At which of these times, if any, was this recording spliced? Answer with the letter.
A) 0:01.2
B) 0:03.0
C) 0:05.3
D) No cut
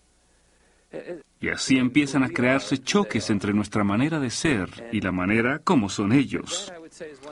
A